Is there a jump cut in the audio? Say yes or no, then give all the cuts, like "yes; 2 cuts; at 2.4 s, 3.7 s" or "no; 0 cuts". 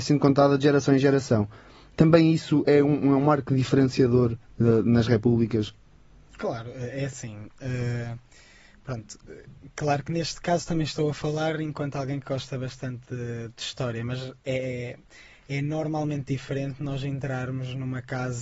no; 0 cuts